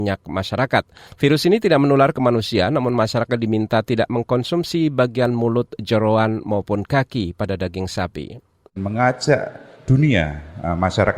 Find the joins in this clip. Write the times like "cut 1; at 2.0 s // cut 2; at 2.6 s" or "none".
cut 1; at 1.1 s // cut 2; at 8.7 s